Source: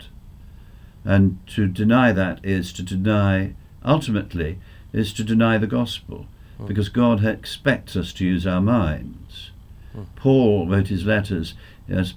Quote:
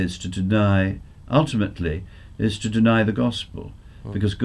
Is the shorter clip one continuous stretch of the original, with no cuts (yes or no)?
yes